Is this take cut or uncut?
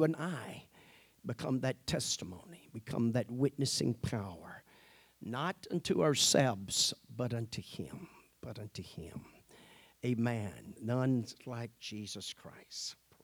uncut